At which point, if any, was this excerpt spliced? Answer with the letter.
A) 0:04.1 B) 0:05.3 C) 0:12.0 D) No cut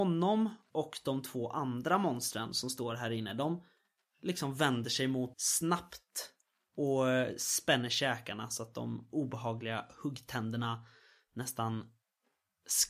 B